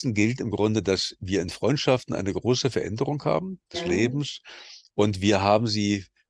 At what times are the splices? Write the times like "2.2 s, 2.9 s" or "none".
3.7 s